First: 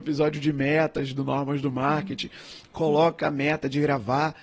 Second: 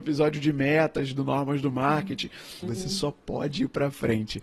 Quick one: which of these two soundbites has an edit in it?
second; 1 cut; at 2.6 s

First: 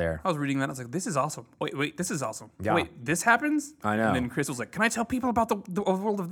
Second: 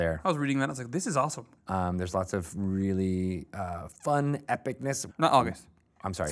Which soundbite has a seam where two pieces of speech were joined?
second; 2 cuts; at 1.6 s, 5.1 s

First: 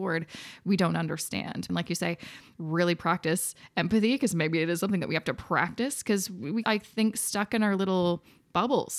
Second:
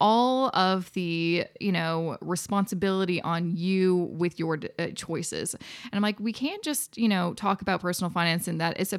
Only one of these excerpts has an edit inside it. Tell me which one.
first; 2 cuts; at 1.7 s, 6.6 s

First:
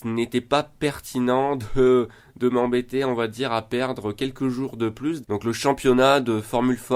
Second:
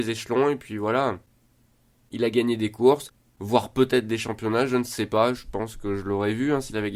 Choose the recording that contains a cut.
first; 1 cut; at 5.2 s

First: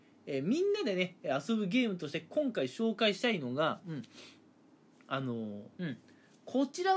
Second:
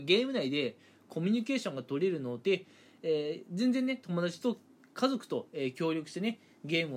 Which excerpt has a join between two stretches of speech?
first; 1 cut; at 5.7 s

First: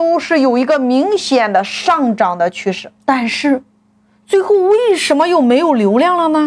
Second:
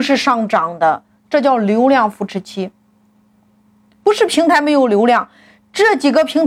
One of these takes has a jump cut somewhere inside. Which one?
first; 1 cut; at 3.0 s

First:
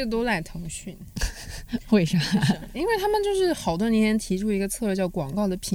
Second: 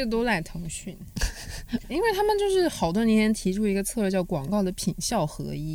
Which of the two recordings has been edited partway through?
second; 1 cut; at 1.8 s

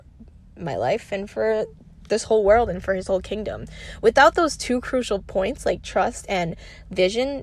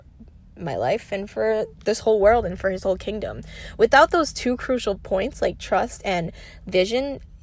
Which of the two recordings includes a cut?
second; 1 cut; at 1.8 s

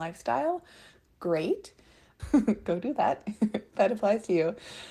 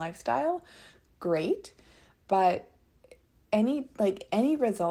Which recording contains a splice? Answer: first; 1 cut; at 2.2 s

